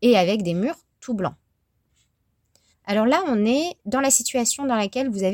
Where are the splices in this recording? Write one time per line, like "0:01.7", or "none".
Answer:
0:02.7
0:03.8